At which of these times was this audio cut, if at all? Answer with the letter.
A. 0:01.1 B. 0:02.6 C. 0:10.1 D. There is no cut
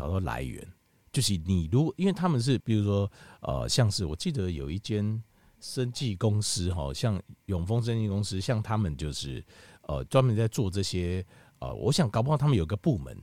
B